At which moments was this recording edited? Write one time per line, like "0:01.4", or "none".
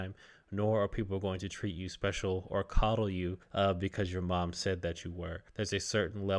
none